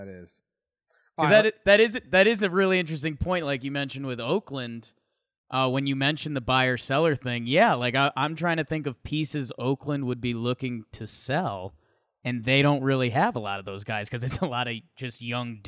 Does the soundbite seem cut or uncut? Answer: uncut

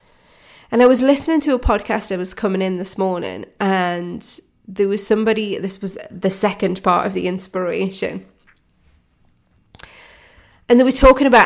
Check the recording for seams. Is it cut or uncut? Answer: uncut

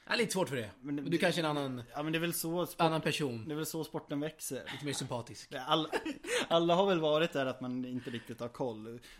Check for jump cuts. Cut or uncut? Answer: cut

